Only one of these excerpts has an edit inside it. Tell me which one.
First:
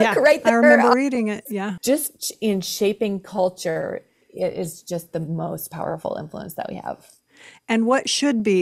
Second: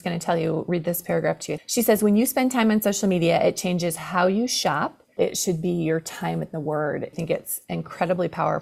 second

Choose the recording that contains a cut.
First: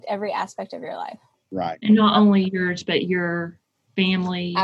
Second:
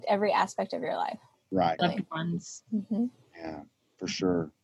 second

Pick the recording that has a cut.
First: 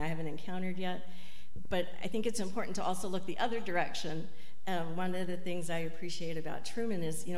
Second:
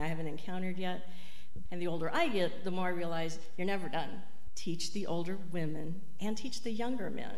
second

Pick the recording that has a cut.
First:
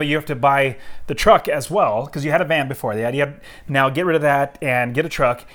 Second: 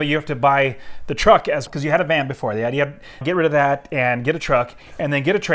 second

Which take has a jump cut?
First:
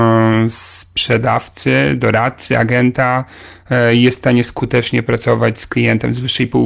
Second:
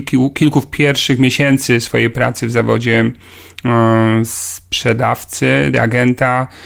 second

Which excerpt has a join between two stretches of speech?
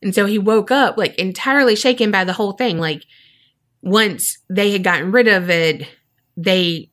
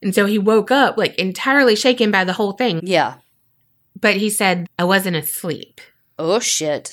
second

